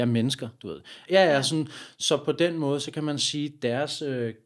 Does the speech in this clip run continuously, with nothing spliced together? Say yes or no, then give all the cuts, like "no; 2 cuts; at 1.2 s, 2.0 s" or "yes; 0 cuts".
no; 1 cut; at 1.1 s